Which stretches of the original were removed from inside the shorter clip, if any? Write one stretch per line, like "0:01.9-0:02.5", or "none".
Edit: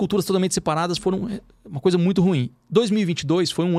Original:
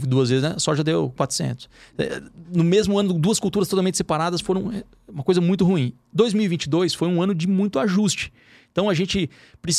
none